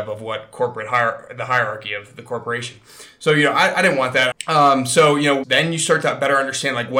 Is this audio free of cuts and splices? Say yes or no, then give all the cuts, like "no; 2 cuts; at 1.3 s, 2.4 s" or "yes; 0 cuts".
no; 2 cuts; at 4.3 s, 5.4 s